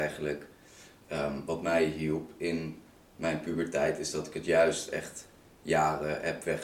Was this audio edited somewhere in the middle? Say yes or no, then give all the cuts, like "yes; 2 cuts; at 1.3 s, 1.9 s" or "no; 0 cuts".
no; 0 cuts